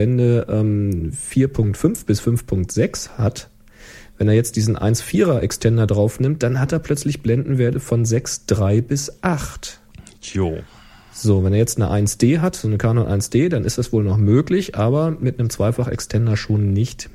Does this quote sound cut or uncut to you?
uncut